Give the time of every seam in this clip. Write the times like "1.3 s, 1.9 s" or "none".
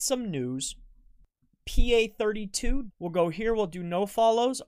2.9 s